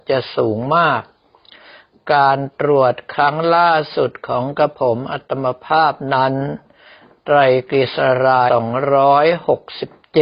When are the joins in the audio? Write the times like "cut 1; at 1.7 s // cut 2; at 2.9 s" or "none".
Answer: cut 1; at 8.5 s